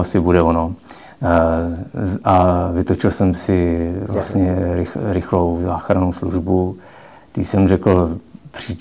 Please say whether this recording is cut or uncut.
uncut